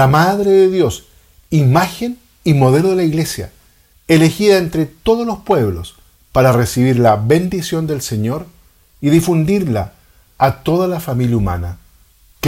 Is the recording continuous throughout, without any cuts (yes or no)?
yes